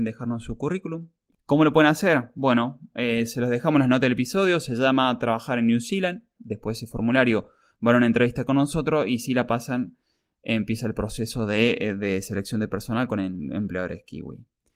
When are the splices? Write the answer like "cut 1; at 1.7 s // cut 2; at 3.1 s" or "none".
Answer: cut 1; at 6.4 s